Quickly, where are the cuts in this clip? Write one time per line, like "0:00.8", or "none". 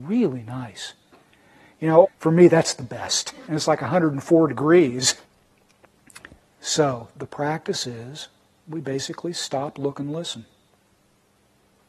0:02.0
0:03.5
0:05.2